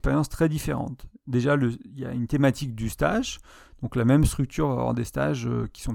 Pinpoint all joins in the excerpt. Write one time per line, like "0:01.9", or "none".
none